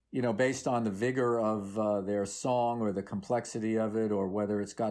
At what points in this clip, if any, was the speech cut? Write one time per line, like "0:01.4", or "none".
none